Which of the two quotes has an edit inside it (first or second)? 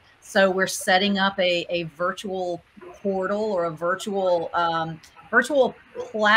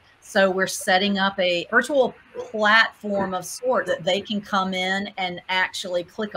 second